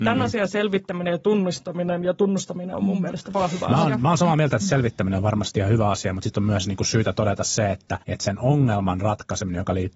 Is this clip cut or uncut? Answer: cut